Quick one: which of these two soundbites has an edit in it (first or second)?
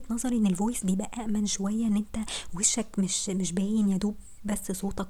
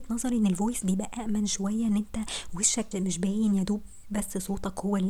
second